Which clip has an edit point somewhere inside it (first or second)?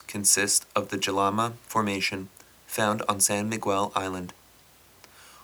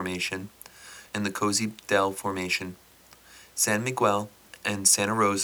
second